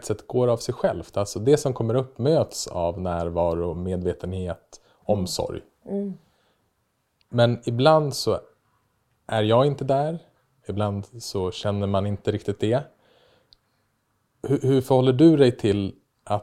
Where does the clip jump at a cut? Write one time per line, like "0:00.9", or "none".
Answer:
none